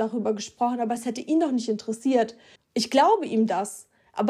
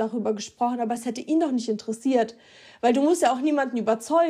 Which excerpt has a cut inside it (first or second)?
first